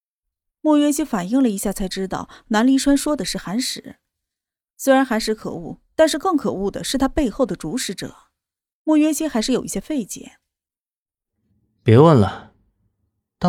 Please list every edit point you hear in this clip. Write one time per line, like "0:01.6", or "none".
0:08.7